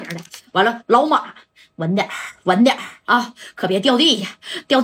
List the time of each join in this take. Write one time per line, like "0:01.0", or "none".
none